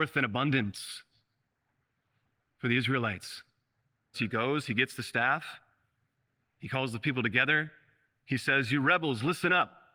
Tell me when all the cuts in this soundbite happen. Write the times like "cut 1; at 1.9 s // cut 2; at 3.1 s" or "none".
cut 1; at 4.1 s